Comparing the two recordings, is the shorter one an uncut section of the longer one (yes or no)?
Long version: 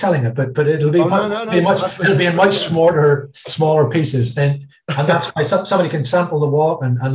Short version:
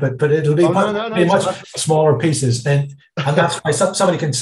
no